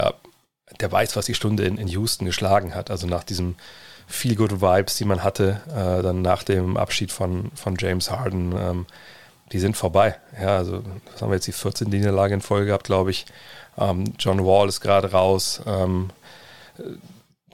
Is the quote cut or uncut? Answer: uncut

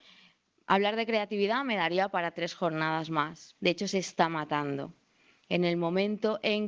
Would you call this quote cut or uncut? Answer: cut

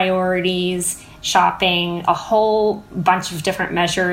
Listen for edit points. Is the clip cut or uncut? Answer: uncut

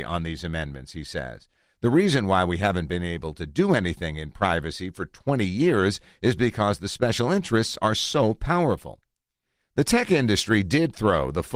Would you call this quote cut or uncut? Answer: uncut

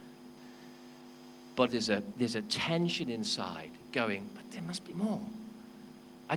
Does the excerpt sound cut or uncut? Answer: cut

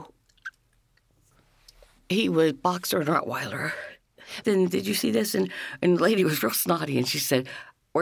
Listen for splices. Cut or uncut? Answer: cut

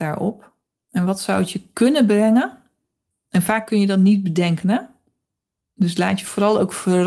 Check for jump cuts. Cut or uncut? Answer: uncut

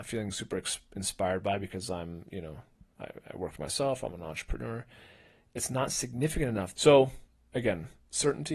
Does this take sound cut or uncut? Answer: cut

